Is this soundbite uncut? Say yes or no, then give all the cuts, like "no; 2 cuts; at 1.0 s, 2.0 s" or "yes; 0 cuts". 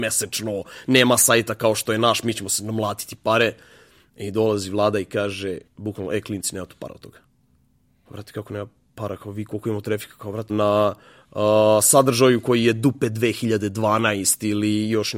no; 2 cuts; at 5.7 s, 10.5 s